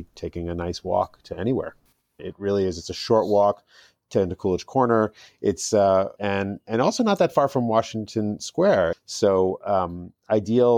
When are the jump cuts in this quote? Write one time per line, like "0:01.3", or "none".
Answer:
0:02.2
0:06.2
0:08.9